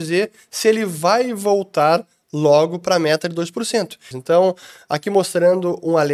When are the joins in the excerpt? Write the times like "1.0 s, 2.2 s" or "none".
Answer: 4.1 s